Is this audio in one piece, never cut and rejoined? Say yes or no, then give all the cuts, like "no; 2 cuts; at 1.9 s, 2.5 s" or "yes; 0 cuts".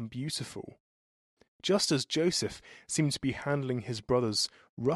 yes; 0 cuts